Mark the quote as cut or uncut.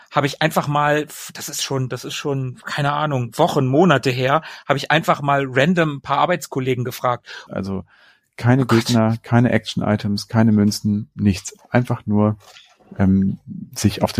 cut